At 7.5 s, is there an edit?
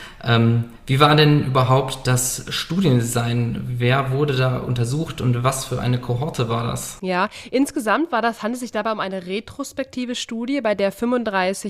no; 0 cuts

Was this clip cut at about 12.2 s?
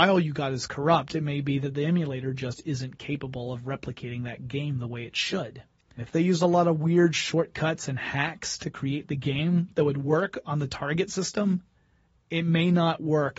no; 1 cut; at 6.0 s

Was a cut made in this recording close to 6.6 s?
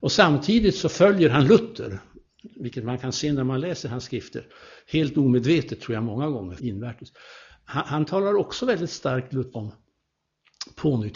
yes; 2 cuts; at 6.6 s, 9.5 s

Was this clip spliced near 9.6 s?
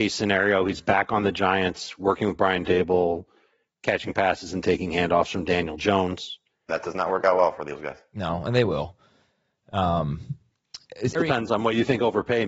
no; 2 cuts; at 6.7 s, 11.2 s

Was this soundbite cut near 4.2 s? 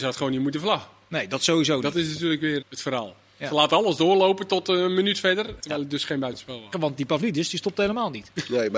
no; 3 cuts; at 2.6 s, 5.6 s, 6.7 s

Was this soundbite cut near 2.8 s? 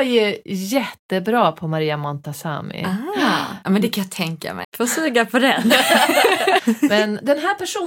no; 2 cuts; at 4.6 s, 6.6 s

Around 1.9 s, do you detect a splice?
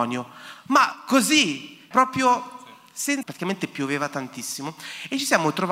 yes; 2 cuts; at 1.9 s, 3.2 s

